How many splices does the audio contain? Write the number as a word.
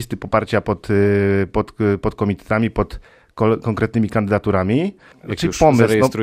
one